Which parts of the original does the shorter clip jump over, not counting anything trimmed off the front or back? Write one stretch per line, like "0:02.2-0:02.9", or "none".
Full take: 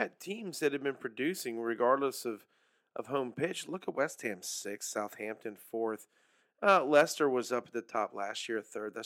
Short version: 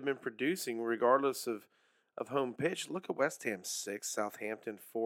none

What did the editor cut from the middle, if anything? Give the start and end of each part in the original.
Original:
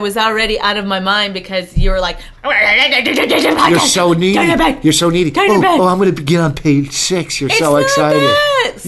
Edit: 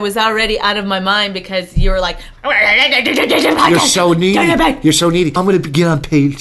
0:05.4-0:05.9

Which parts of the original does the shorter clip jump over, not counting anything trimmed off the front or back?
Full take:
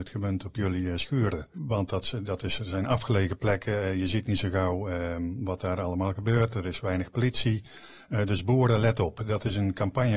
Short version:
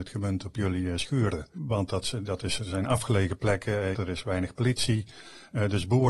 0:03.9-0:06.5

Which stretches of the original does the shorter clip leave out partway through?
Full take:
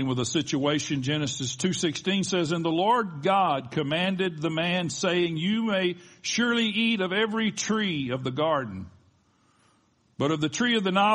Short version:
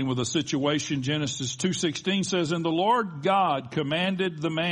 none

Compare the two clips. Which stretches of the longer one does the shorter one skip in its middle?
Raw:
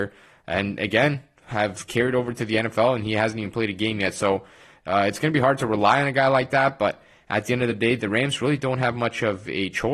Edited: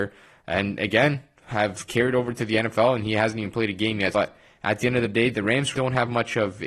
0:04.1-0:06.8
0:08.4-0:08.6

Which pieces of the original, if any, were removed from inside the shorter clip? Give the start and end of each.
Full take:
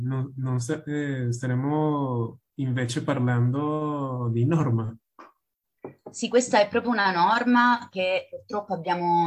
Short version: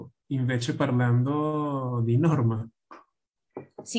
none

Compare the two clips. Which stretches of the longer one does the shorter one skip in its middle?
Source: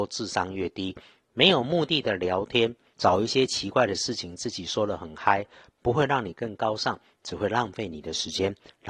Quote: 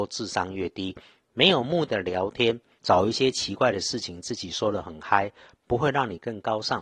0:01.9-0:02.0

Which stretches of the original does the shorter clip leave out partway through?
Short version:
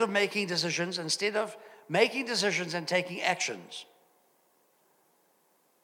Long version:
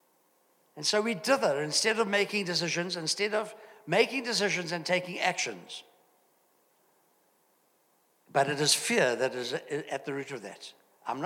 none

